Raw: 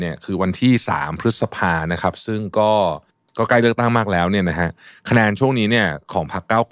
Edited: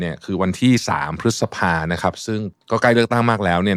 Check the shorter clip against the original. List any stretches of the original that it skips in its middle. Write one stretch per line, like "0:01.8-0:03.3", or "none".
0:02.5-0:03.2